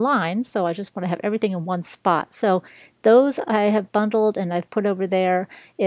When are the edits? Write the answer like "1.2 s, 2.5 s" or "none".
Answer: none